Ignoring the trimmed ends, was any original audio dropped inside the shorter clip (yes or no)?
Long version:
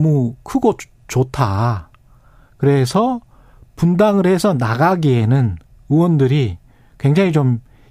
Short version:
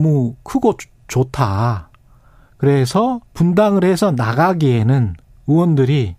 yes